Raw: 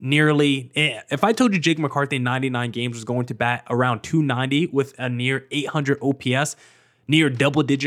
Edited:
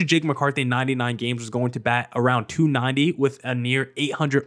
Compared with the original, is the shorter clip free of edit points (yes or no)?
yes